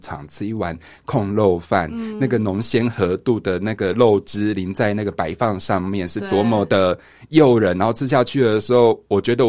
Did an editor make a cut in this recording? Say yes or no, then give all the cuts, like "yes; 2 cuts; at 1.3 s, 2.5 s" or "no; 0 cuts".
no; 0 cuts